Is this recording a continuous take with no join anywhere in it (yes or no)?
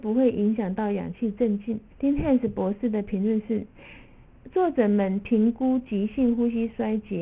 no